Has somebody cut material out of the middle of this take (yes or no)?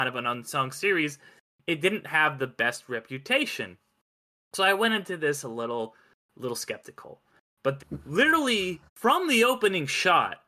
yes